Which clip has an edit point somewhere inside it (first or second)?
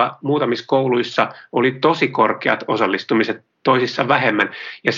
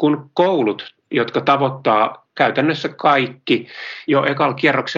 second